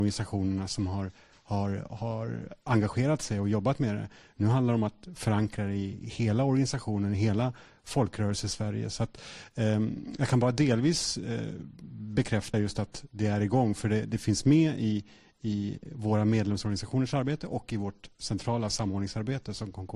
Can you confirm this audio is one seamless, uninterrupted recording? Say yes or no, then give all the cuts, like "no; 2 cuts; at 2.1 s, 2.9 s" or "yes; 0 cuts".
yes; 0 cuts